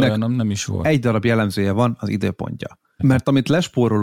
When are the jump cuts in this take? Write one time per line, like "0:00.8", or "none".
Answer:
0:03.0

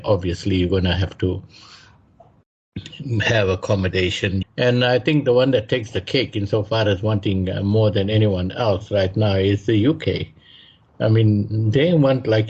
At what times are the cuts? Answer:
0:04.4

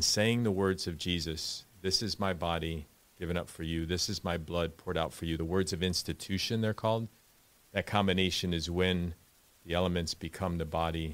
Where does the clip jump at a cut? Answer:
none

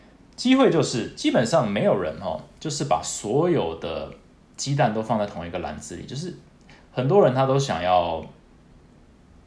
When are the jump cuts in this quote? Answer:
none

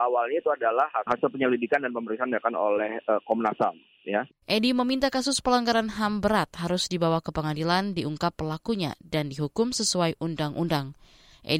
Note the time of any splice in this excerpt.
0:04.3

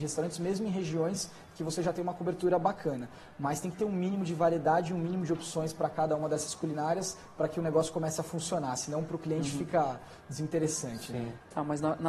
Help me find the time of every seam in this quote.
none

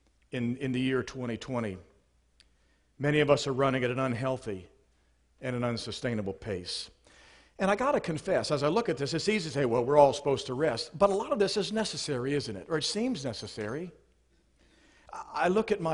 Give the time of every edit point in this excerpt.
none

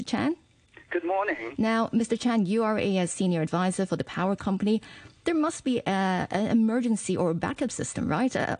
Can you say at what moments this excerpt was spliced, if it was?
0:01.6

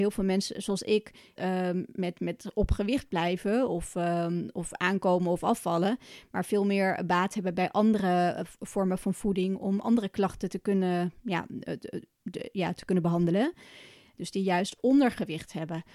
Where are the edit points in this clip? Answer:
0:01.4
0:14.1

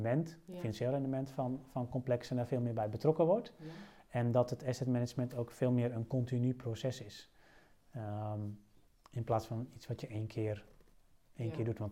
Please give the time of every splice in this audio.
none

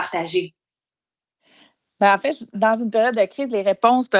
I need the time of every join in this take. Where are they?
none

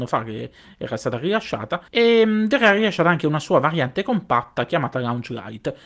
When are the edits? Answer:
0:01.9

